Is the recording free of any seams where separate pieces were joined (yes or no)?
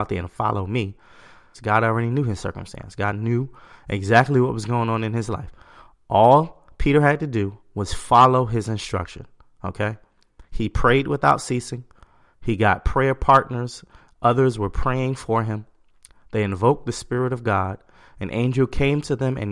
no